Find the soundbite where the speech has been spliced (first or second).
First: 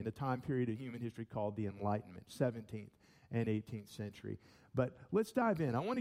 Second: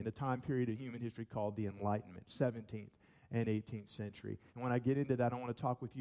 second